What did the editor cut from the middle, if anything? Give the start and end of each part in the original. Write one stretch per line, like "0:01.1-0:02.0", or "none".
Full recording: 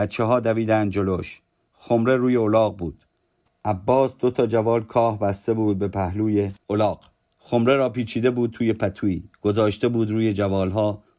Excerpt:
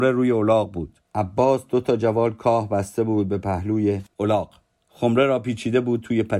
0:03.1-0:03.6